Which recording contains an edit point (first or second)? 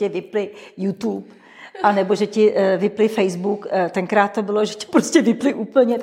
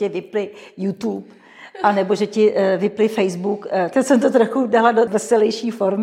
second